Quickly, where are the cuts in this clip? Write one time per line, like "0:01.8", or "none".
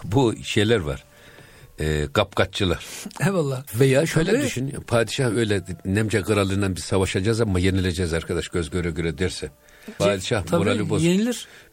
0:03.7
0:10.0